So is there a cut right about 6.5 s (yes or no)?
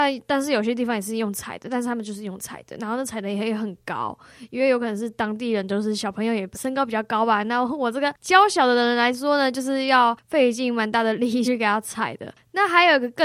yes